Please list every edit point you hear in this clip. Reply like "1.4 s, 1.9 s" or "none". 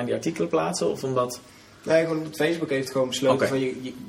none